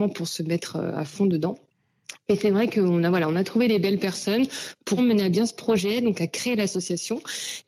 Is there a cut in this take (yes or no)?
yes